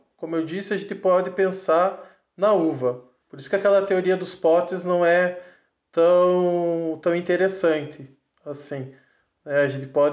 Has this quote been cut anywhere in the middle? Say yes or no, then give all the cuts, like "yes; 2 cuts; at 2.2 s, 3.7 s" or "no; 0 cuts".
yes; 1 cut; at 3.2 s